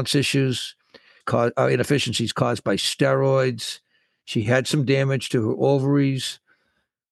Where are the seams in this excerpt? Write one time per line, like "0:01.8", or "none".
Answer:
0:01.2